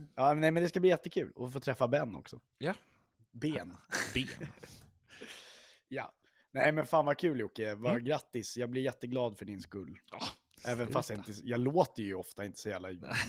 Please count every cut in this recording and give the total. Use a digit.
0